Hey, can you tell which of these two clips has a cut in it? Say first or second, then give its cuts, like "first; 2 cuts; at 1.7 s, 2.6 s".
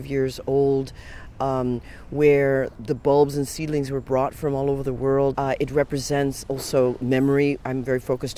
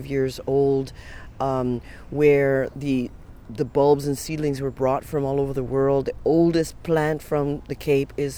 first; 2 cuts; at 2.7 s, 5.3 s